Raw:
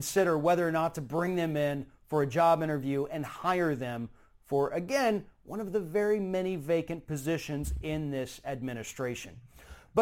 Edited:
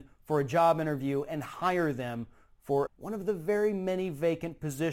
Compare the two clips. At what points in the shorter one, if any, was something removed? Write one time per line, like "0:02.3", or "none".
0:02.9